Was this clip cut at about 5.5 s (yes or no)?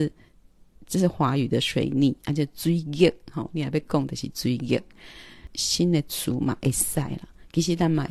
yes